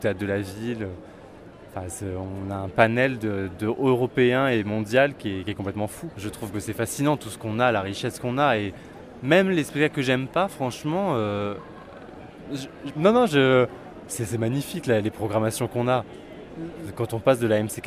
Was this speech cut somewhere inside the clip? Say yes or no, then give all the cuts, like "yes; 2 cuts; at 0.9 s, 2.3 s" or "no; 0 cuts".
yes; 2 cuts; at 6.1 s, 12.9 s